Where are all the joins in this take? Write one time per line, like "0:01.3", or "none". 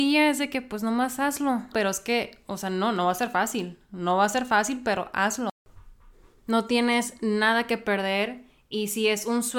0:01.7